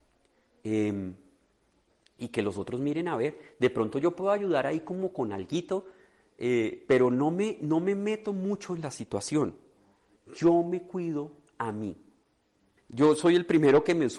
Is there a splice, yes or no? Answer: yes